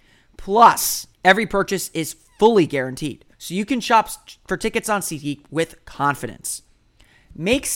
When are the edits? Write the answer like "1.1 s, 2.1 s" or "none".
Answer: 1.1 s, 3.3 s

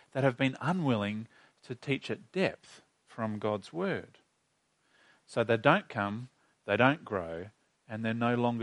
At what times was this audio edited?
none

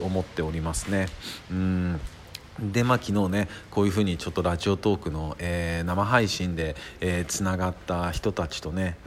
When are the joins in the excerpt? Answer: none

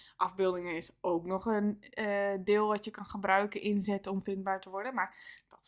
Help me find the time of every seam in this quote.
none

